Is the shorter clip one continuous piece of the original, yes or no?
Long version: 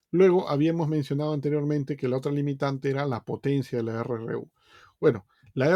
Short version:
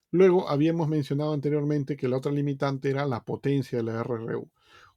yes